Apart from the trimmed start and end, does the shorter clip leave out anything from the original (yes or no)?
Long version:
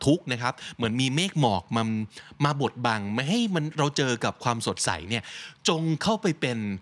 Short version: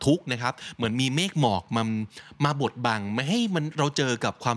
no